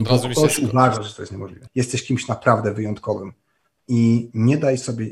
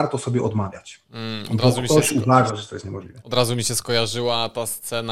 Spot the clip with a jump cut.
first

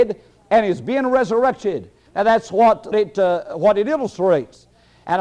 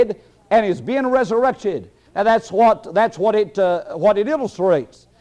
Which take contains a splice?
first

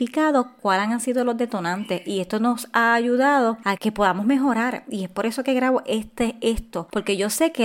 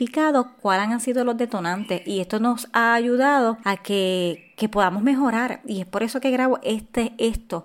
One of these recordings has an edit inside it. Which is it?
first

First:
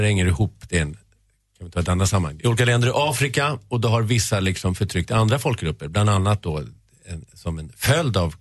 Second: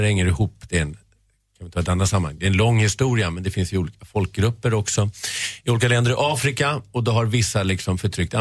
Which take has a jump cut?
first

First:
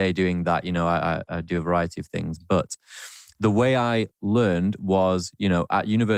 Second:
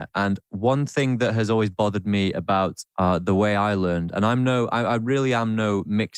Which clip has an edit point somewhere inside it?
second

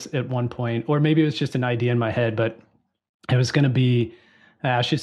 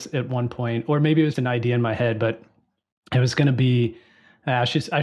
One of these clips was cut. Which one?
second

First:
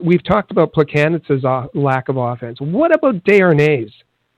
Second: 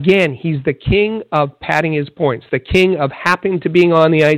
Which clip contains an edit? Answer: second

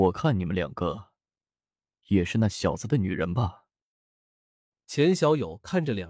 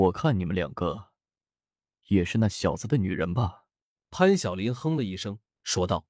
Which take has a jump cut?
second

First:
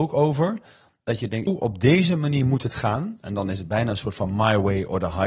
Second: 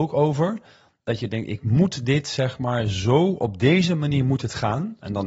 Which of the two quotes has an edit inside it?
first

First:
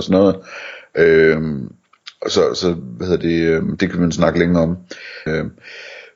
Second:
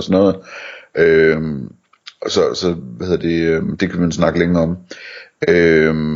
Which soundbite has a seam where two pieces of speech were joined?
first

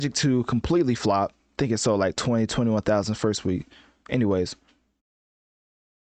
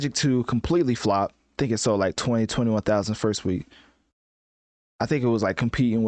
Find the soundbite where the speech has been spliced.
first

